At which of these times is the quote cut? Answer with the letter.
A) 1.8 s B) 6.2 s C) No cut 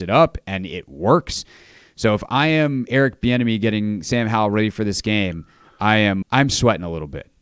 B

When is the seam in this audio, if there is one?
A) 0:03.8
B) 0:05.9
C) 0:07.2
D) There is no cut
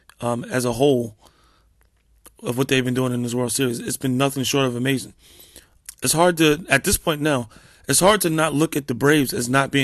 D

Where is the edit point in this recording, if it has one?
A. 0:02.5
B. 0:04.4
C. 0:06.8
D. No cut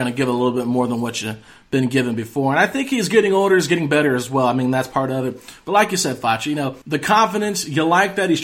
C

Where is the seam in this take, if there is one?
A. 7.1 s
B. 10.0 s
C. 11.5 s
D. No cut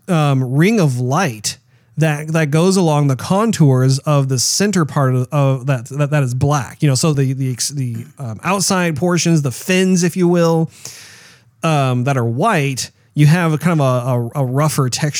A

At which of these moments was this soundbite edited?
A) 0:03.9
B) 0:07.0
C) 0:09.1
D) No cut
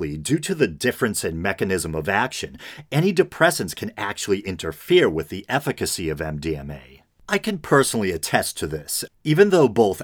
C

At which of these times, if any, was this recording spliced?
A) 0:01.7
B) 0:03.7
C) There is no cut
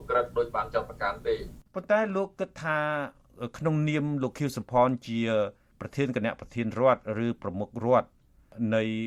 A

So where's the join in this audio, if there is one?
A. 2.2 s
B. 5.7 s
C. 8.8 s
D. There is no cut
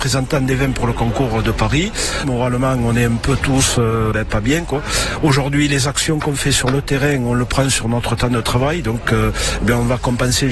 A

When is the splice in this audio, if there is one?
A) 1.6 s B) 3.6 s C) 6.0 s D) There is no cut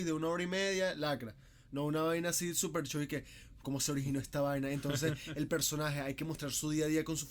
B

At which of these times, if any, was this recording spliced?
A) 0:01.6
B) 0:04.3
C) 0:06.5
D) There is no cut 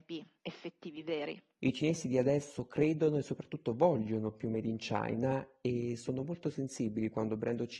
A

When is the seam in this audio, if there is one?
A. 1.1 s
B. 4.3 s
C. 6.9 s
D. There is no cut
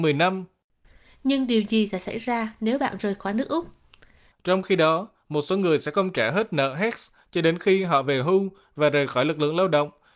B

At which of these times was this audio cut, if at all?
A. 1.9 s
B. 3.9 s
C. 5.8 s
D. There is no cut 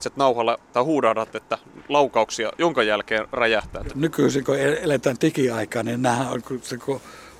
B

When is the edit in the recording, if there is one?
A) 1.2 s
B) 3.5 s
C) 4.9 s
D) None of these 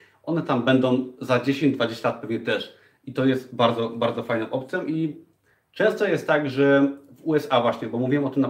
D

